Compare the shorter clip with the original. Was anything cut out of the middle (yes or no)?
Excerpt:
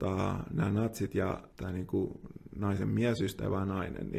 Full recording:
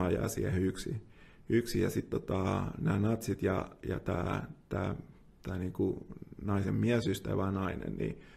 yes